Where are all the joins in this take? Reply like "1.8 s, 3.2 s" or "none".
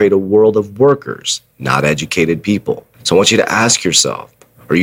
2.9 s

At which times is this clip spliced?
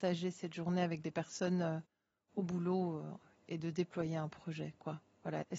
none

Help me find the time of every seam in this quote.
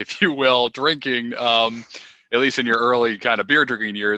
none

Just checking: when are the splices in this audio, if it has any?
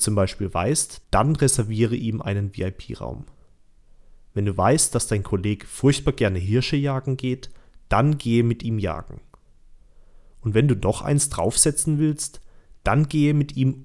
1.0 s

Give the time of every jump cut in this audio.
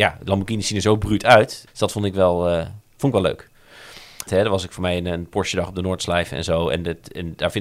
1.7 s, 4.3 s

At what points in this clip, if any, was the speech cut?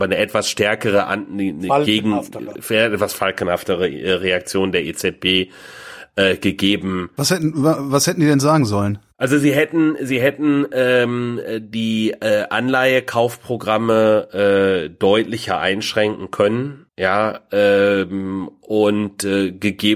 16.9 s

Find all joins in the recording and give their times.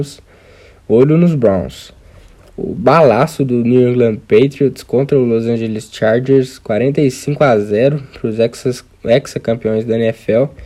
none

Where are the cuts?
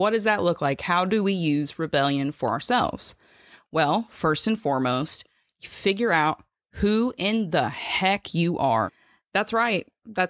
none

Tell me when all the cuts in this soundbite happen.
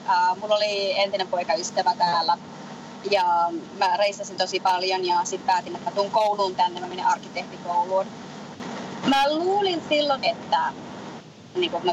9.0 s, 10.2 s

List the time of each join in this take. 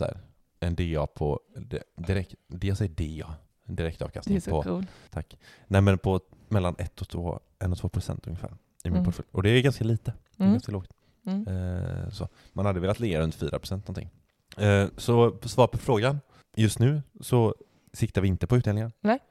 14.9 s, 16.5 s

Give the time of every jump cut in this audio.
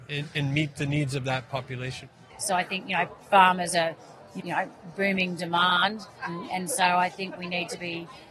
2.3 s, 4.4 s, 6.2 s

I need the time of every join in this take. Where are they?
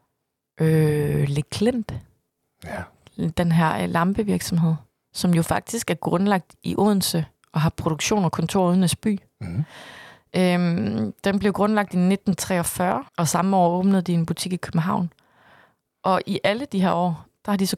13.1 s

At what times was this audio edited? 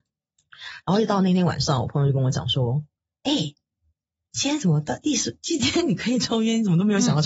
none

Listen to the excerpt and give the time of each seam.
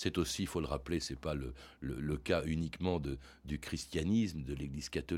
none

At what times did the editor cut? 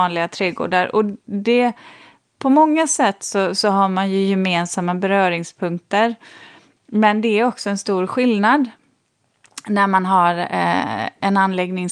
none

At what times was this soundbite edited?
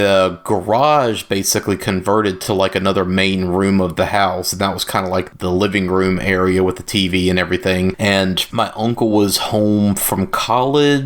none

